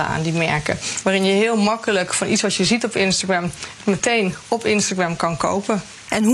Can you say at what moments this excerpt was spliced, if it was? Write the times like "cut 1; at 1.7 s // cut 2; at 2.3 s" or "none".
cut 1; at 1.0 s

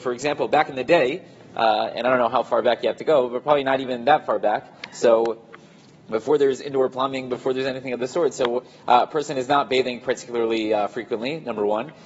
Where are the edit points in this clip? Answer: none

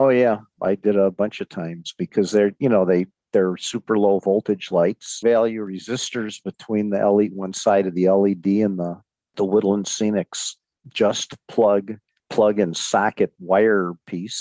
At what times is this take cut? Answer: cut 1; at 5.2 s

